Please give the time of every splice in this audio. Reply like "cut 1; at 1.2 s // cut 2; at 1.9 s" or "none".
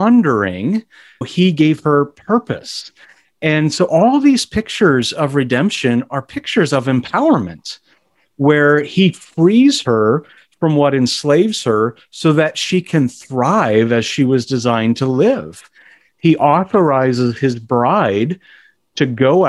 cut 1; at 16.1 s